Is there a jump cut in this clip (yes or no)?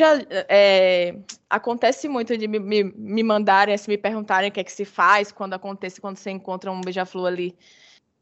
no